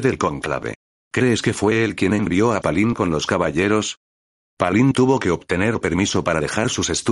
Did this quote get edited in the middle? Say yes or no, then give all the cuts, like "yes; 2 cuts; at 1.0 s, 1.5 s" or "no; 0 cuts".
no; 0 cuts